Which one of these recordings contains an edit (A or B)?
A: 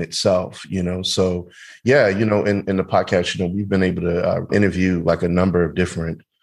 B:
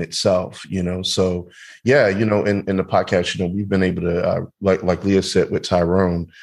A